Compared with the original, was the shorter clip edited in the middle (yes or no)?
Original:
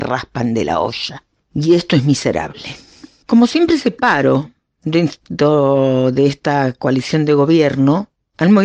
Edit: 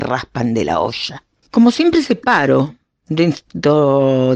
yes